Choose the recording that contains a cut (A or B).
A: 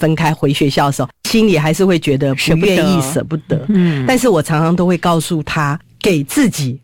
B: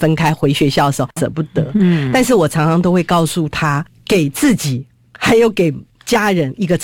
B